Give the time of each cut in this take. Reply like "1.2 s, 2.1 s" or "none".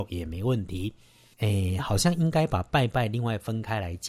none